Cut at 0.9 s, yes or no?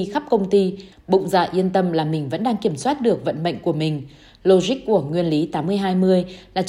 yes